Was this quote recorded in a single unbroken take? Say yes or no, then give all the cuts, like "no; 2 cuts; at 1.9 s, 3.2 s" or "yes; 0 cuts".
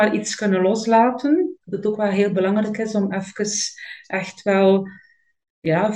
yes; 0 cuts